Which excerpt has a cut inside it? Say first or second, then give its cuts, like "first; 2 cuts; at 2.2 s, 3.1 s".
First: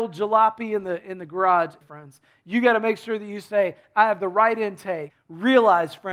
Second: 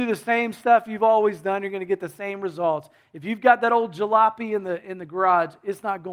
first; 2 cuts; at 1.8 s, 5.1 s